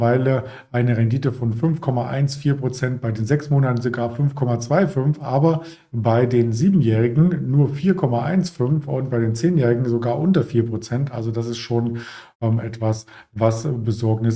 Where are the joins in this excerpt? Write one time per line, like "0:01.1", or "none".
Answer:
none